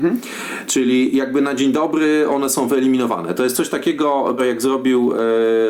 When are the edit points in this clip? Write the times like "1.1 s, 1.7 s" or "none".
4.4 s